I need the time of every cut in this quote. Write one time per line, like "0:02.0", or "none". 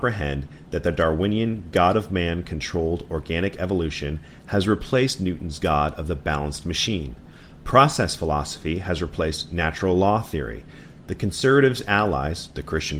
none

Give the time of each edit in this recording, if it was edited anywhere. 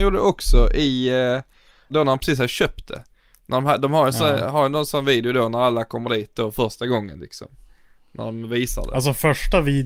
0:01.9

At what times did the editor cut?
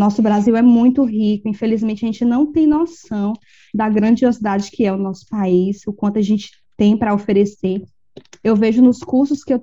none

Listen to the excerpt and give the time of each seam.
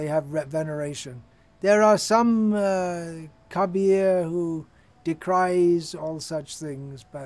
none

